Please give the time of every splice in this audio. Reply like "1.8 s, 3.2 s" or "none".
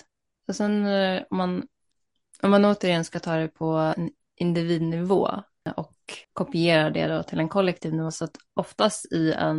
6.2 s